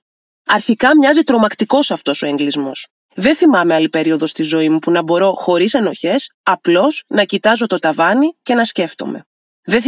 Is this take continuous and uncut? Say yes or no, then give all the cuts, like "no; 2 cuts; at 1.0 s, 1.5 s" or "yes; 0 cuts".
no; 1 cut; at 3.0 s